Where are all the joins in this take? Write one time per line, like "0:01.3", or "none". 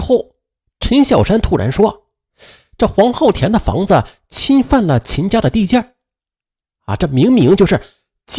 none